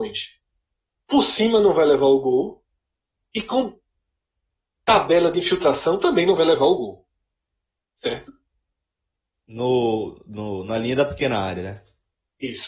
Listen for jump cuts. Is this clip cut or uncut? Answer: cut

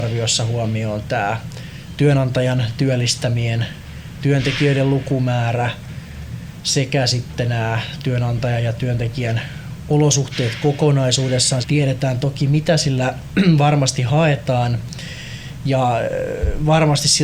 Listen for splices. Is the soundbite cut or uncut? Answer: cut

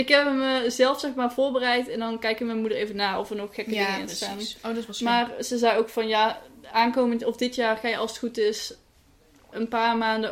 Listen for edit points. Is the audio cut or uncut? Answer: uncut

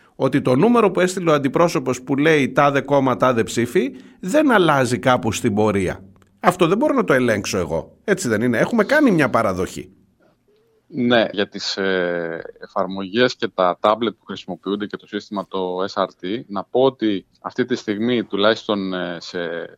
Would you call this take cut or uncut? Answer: cut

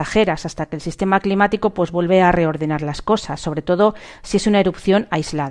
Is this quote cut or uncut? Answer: uncut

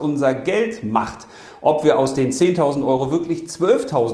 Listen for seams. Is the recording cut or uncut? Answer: uncut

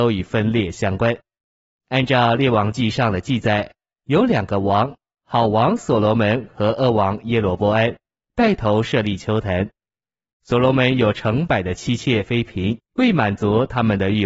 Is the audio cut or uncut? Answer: cut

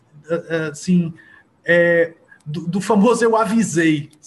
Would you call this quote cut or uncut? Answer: uncut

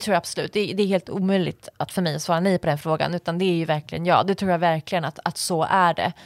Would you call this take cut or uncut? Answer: uncut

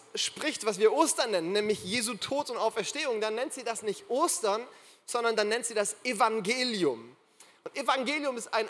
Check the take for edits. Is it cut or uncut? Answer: uncut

